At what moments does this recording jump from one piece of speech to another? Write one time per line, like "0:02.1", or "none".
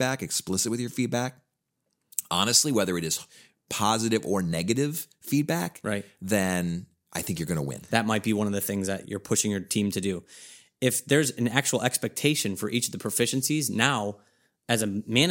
0:07.9
0:09.0